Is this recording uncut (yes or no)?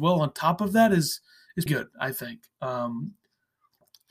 no